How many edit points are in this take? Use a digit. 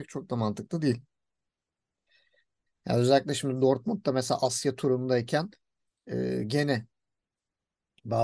1